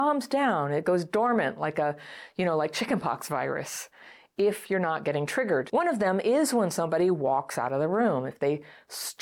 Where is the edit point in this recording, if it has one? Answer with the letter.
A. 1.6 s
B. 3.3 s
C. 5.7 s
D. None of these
C